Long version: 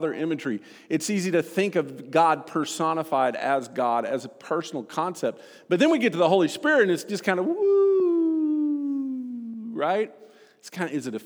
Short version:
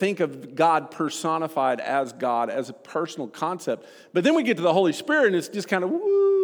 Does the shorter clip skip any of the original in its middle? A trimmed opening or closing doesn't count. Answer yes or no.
no